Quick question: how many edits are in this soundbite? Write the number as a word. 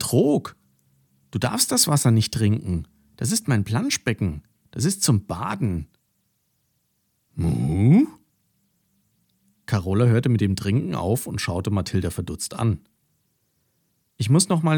zero